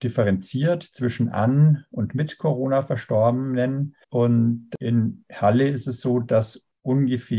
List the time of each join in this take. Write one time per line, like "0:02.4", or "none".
0:04.0